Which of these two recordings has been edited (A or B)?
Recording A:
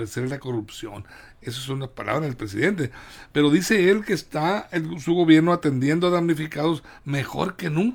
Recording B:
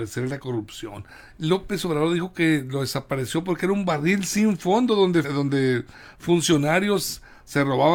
B